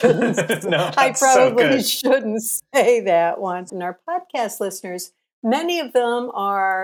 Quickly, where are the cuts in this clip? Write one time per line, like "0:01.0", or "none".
0:03.7